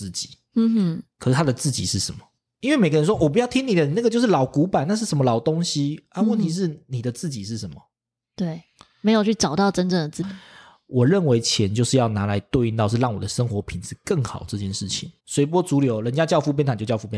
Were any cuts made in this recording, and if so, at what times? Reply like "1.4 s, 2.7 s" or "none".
10.2 s, 15.2 s